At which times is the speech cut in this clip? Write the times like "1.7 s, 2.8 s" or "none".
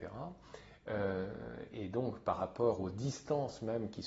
none